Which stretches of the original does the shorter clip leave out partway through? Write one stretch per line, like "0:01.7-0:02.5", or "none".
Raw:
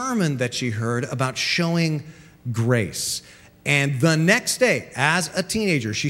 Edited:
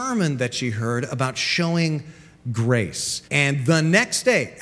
0:03.2-0:03.6